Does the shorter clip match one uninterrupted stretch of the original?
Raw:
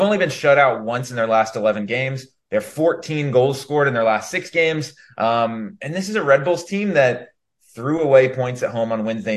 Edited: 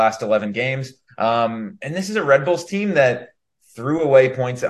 no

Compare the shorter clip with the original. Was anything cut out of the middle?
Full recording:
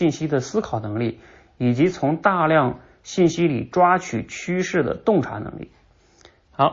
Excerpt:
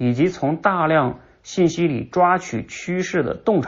no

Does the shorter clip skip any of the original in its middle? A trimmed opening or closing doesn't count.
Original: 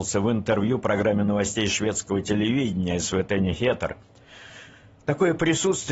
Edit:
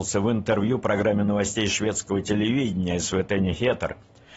no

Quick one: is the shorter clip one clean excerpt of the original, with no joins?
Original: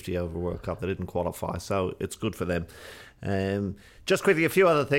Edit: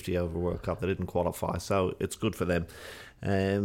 yes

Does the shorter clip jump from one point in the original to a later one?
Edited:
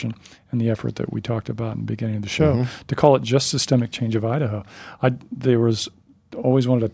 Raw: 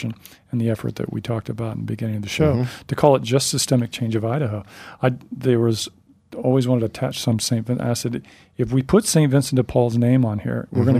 no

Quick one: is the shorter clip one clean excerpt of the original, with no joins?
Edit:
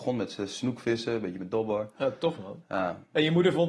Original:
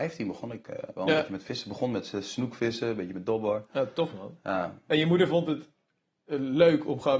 yes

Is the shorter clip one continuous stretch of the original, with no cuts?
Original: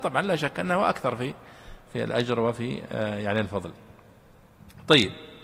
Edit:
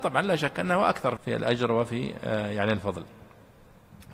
no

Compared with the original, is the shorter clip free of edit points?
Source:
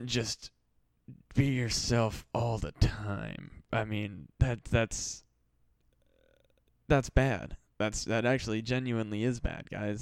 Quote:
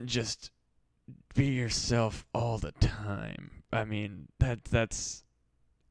yes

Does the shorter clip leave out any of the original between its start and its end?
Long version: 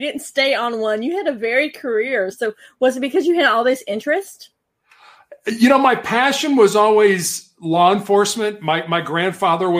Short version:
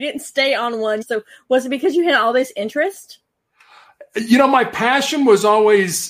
yes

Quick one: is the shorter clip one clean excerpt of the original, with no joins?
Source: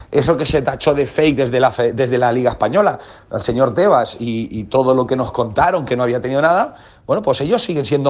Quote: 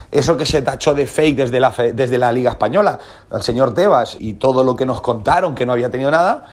no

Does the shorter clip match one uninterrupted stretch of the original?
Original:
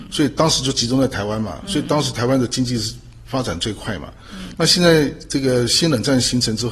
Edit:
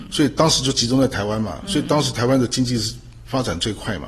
yes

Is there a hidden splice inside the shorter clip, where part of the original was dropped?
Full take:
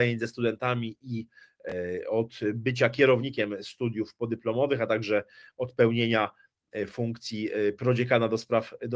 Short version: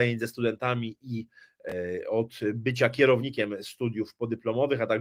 no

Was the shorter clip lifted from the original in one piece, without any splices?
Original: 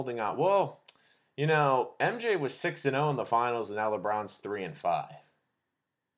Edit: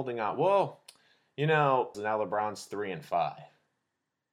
no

